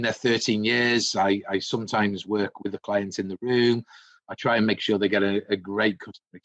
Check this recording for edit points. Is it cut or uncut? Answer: uncut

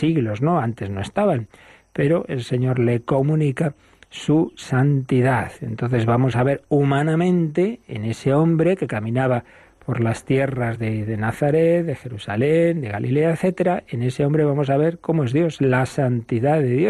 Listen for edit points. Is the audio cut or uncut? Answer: uncut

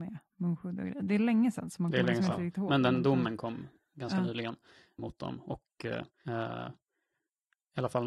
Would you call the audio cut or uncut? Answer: cut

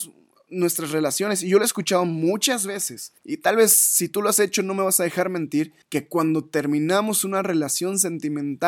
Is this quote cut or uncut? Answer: cut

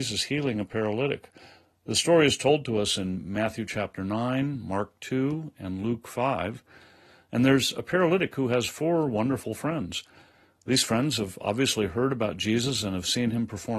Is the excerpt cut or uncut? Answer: uncut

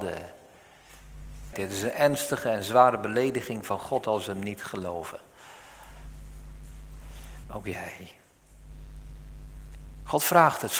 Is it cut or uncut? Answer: cut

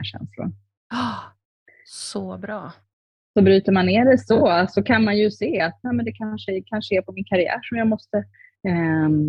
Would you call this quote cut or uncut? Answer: uncut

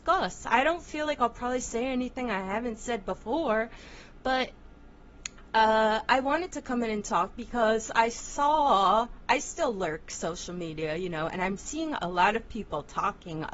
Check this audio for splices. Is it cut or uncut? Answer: uncut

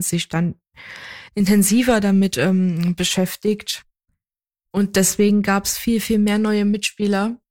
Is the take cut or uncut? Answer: uncut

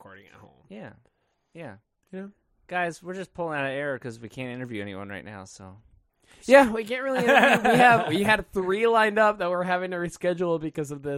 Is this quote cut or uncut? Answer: uncut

